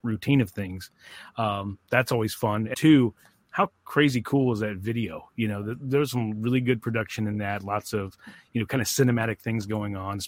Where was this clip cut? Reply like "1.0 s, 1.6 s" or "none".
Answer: 2.7 s